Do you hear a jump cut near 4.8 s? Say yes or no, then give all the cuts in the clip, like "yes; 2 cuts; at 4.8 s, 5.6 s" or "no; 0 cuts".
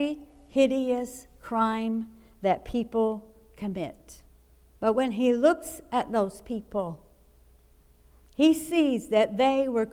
yes; 1 cut; at 4.8 s